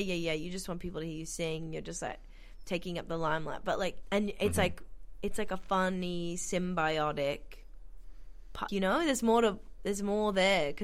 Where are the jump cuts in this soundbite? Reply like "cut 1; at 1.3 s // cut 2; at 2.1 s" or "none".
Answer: cut 1; at 4.0 s // cut 2; at 8.7 s